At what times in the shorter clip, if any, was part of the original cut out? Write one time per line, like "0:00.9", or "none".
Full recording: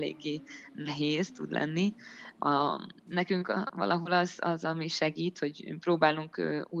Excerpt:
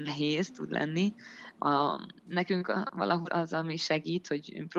0:03.3